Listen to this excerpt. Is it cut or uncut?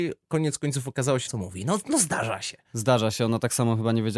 cut